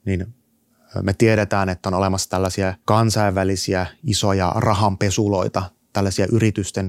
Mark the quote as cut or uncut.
uncut